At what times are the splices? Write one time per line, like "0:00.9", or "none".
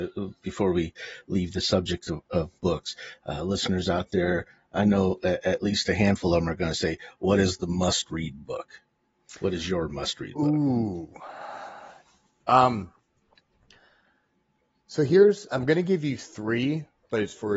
0:12.4
0:15.5